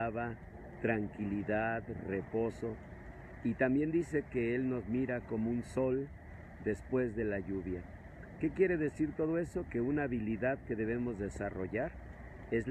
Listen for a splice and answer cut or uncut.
uncut